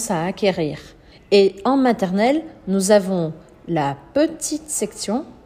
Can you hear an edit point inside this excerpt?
yes; 1 cut; at 1.1 s

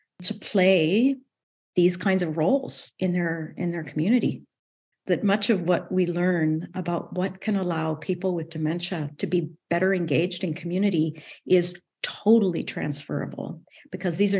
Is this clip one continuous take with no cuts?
no; 1 cut; at 4.9 s

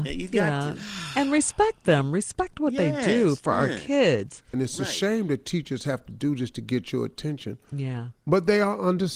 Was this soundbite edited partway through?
yes; 1 cut; at 4.5 s

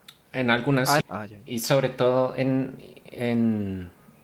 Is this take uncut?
no; 1 cut; at 1.0 s

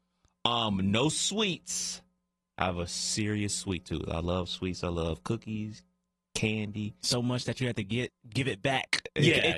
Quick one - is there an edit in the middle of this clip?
no; 0 cuts

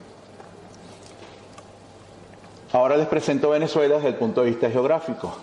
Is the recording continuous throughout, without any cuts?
yes; 0 cuts

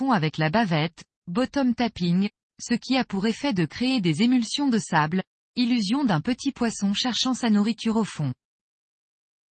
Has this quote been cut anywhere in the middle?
no; 0 cuts

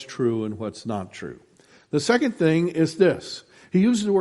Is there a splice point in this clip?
no; 0 cuts

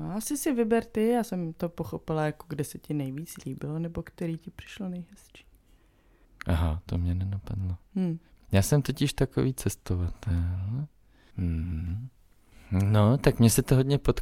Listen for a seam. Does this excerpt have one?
yes; 2 cuts; at 6.2 s, 11.3 s

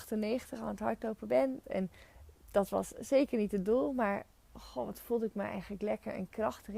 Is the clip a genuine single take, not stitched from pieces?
no; 1 cut; at 1.6 s

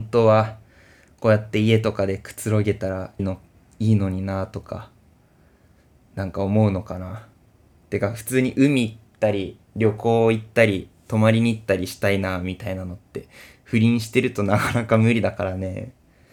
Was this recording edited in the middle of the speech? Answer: yes; 1 cut; at 3.2 s

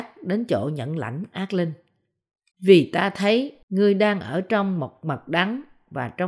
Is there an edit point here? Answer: yes; 2 cuts; at 2.5 s, 3.6 s

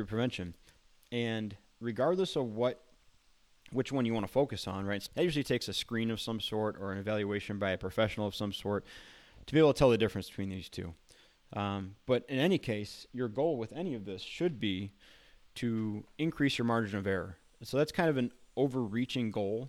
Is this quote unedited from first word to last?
no; 1 cut; at 5.1 s

